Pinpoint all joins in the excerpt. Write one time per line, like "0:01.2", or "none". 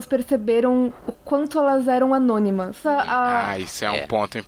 0:02.8